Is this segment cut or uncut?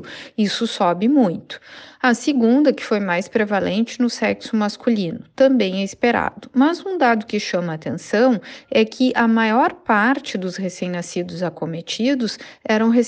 uncut